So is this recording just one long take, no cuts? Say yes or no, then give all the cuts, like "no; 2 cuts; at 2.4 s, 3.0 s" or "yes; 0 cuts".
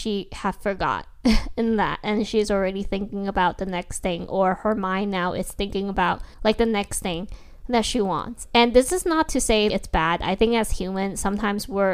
no; 2 cuts; at 6.3 s, 9.7 s